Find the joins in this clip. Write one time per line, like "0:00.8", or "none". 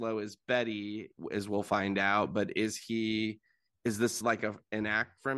none